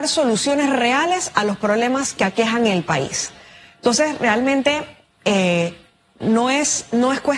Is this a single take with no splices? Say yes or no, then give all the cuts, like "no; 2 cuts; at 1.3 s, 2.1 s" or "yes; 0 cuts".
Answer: yes; 0 cuts